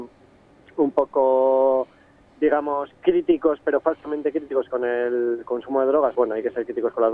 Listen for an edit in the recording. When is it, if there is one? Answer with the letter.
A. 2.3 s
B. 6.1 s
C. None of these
B